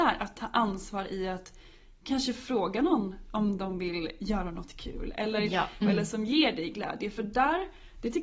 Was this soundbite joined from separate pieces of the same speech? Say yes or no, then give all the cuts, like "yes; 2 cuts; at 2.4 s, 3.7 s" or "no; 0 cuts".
yes; 1 cut; at 5.8 s